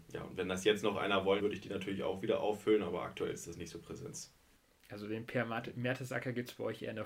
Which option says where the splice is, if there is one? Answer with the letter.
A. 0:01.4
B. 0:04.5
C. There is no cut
A